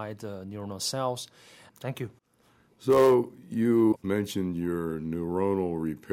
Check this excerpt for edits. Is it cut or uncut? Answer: cut